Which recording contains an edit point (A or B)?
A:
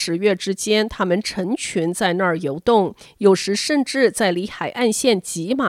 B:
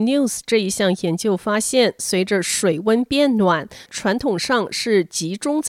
B